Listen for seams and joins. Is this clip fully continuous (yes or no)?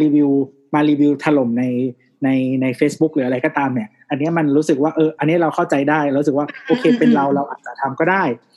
no